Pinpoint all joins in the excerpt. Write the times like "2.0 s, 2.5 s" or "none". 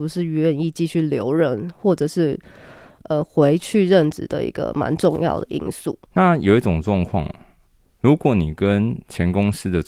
6.1 s